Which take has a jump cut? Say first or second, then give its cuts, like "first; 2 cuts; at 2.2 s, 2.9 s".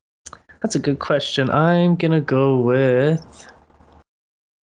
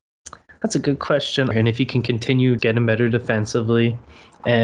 second; 2 cuts; at 1.5 s, 2.6 s